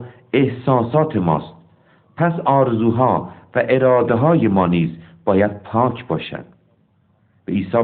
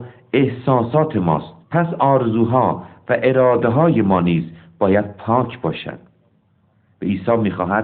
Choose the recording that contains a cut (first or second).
second